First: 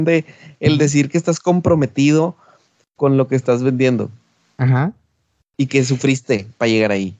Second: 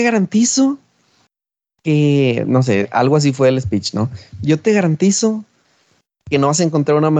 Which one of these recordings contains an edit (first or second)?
second